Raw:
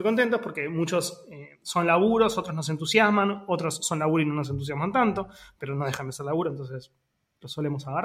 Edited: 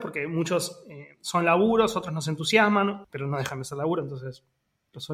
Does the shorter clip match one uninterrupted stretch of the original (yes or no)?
no